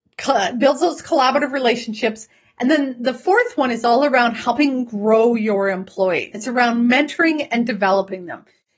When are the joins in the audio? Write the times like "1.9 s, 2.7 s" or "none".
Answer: none